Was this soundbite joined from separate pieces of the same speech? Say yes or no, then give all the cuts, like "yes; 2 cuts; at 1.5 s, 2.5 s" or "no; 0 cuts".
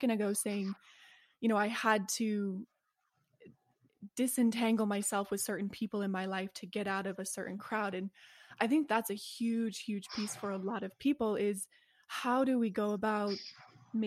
no; 0 cuts